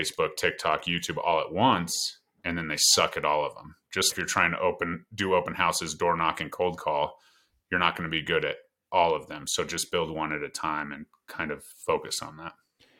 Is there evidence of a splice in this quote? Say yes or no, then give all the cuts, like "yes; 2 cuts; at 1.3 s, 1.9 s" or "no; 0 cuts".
yes; 1 cut; at 4.1 s